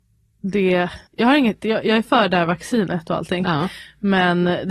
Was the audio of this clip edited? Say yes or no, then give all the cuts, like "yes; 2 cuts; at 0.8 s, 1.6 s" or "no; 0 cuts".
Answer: yes; 1 cut; at 1.1 s